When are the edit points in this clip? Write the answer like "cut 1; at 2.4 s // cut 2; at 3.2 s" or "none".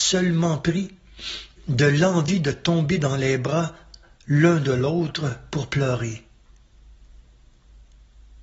cut 1; at 1.6 s